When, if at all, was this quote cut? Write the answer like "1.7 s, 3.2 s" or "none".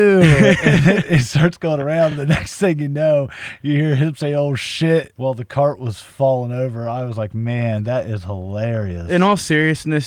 none